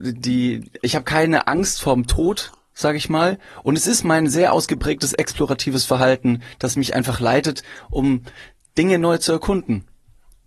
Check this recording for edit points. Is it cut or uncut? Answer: uncut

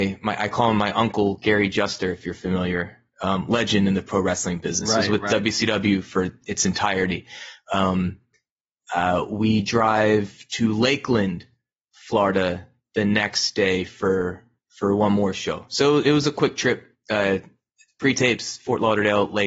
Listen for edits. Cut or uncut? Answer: uncut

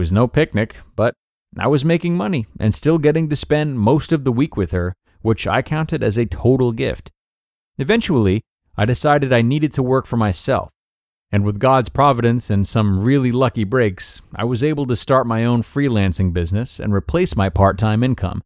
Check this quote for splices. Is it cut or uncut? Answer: uncut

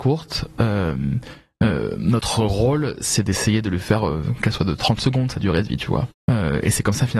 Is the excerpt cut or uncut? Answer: cut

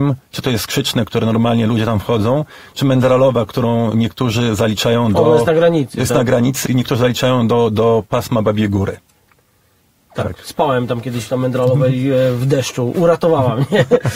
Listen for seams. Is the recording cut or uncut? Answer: cut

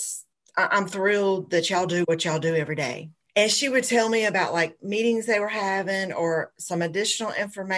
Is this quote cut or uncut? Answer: cut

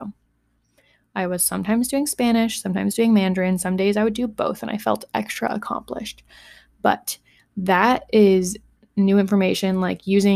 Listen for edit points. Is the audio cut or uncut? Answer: uncut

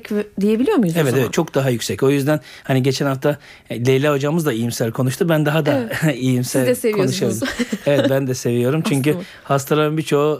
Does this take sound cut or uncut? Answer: uncut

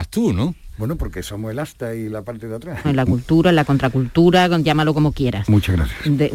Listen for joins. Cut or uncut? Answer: cut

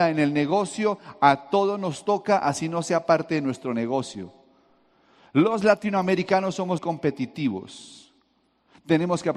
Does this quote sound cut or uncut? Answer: cut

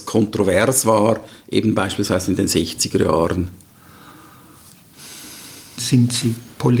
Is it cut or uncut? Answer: cut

